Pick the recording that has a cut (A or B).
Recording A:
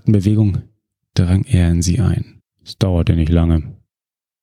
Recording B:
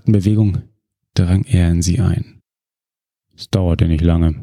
A